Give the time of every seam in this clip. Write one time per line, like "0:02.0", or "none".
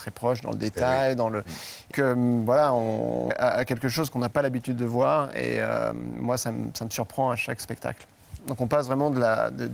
0:01.9
0:03.3
0:08.4